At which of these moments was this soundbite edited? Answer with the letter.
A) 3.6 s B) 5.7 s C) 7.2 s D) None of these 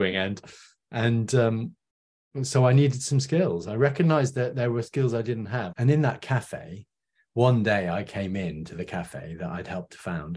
B